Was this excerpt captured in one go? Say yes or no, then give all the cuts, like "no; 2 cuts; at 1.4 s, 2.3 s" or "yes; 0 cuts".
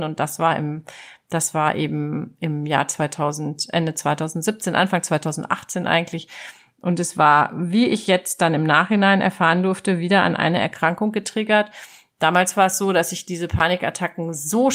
yes; 0 cuts